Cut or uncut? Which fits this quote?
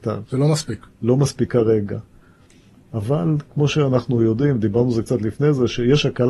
uncut